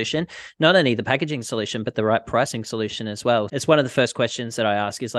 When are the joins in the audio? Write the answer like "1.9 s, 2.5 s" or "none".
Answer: 3.5 s

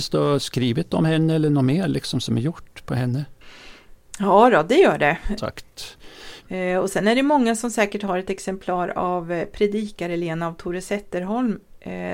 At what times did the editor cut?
5.4 s, 6.4 s

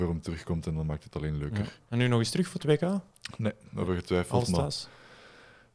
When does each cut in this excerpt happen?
none

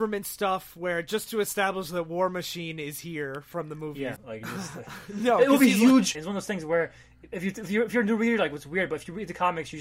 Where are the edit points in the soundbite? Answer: 4.2 s, 6.1 s

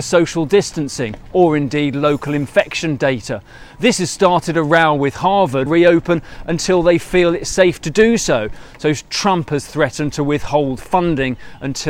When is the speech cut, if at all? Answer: 5.7 s

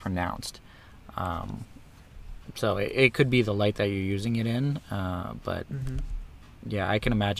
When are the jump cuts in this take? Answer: none

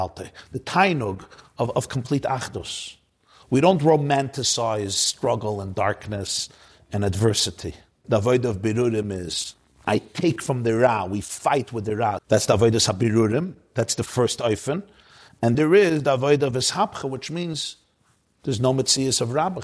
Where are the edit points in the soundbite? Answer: 8.0 s, 12.2 s, 15.5 s

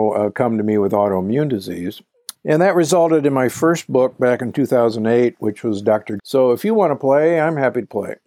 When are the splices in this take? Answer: 2.3 s, 6.2 s

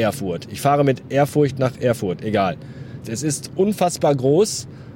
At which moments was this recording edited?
3.0 s

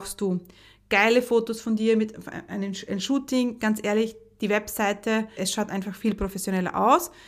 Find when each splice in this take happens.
5.4 s

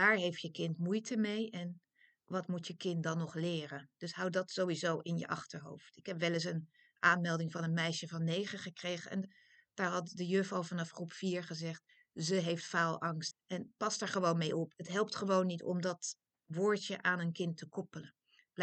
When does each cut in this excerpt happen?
13.3 s, 14.7 s

